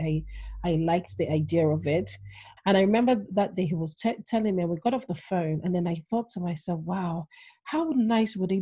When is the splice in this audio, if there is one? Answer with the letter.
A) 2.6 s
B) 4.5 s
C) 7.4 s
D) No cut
A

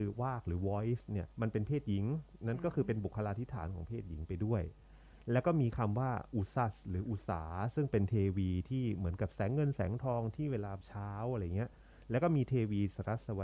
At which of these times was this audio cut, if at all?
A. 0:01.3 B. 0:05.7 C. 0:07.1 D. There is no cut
A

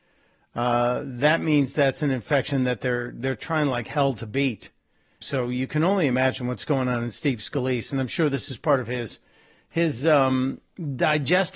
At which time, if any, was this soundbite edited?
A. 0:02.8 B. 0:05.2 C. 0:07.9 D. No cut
B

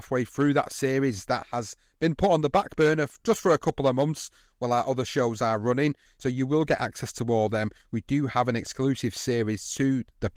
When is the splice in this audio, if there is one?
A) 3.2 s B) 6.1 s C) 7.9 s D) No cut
B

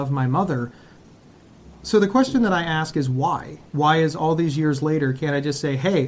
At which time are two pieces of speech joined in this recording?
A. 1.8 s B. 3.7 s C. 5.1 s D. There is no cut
B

